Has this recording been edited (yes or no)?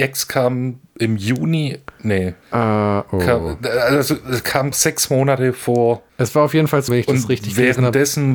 yes